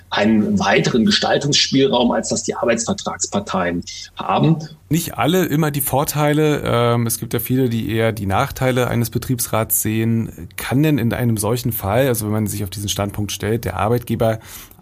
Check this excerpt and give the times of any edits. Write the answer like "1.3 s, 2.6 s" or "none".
4.8 s